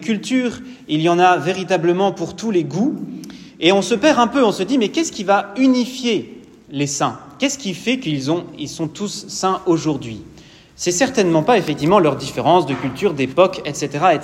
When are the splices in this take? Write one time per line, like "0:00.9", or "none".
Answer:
none